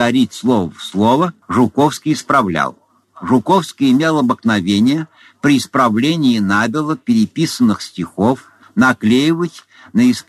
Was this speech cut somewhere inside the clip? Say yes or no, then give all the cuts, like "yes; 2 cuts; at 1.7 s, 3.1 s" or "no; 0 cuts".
yes; 3 cuts; at 1.4 s, 3.0 s, 8.6 s